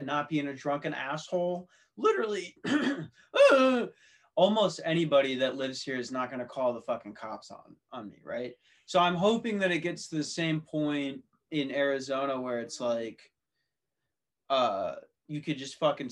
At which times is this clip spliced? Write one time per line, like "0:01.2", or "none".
0:11.5